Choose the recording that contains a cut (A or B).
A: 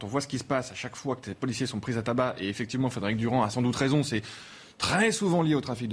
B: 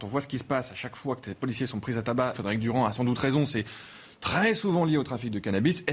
B